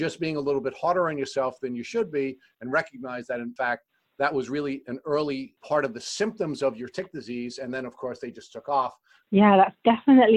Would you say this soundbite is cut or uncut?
cut